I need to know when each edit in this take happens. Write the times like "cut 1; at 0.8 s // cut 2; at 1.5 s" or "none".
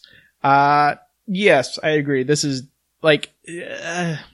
none